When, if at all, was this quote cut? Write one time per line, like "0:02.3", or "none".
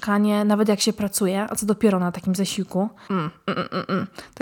0:03.1